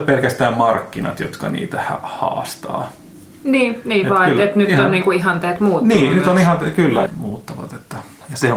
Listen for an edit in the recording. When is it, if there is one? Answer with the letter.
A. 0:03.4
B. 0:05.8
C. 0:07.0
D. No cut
C